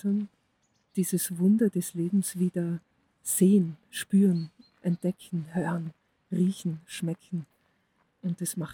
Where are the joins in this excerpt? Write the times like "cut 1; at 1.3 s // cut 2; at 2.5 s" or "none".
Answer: none